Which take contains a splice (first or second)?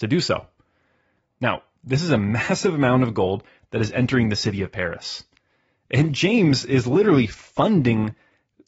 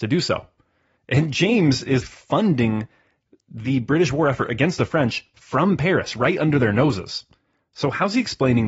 second